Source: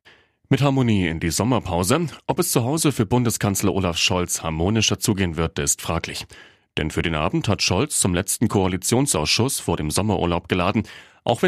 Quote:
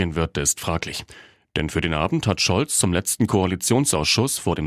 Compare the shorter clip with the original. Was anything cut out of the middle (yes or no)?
no